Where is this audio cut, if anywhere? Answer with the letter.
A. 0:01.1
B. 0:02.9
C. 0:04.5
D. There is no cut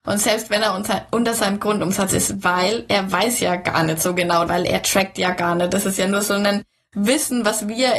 C